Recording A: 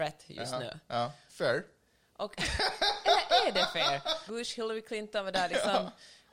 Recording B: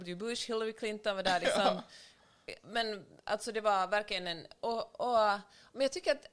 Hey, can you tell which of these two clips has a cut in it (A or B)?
A